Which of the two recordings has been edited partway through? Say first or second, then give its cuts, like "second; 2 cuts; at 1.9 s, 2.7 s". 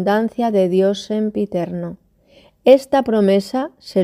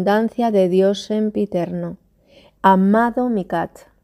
second; 1 cut; at 2.6 s